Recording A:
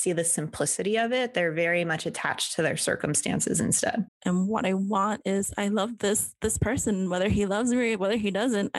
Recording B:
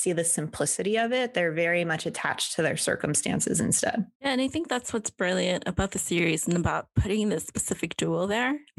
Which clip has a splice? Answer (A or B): A